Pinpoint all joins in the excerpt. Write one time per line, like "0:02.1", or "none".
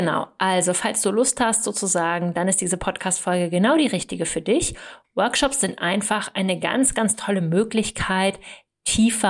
0:05.0